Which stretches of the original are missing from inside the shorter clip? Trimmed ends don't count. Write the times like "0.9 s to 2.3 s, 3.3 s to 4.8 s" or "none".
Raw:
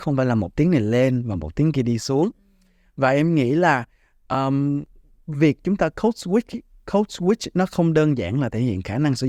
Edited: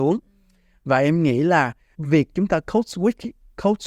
4.1 s to 5.2 s